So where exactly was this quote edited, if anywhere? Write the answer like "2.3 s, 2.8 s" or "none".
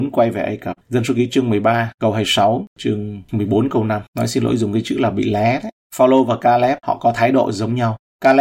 4.1 s